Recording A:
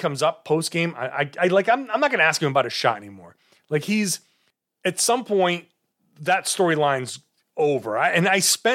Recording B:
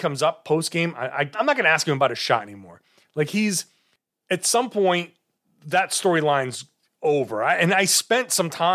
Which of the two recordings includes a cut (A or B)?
B